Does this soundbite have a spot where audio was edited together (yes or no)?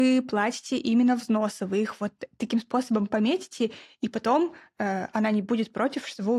no